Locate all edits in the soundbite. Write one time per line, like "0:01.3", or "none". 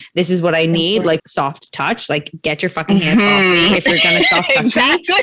0:01.2